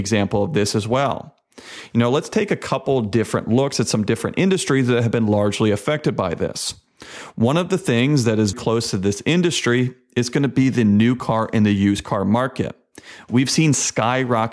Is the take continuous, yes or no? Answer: no